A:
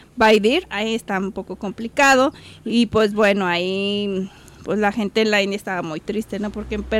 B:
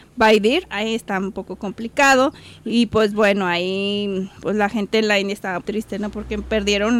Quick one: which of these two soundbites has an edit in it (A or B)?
B